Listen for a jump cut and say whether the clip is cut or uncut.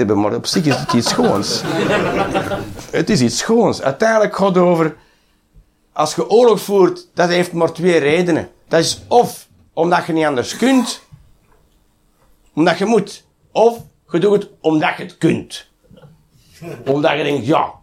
uncut